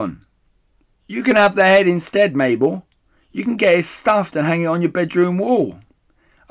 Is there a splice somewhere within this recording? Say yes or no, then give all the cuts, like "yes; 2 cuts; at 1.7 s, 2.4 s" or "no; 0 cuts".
yes; 1 cut; at 0.9 s